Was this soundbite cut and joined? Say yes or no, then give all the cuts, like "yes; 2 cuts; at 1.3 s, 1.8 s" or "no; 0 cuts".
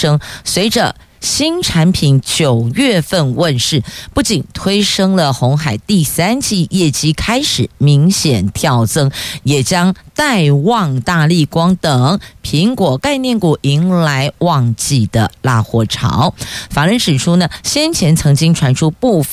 yes; 2 cuts; at 11.0 s, 16.7 s